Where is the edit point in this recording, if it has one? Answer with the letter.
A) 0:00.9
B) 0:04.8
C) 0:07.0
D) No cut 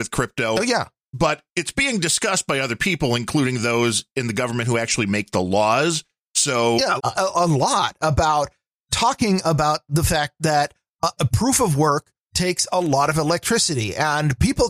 C